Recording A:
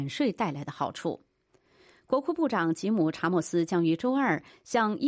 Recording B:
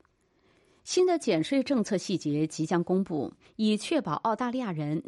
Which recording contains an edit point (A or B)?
B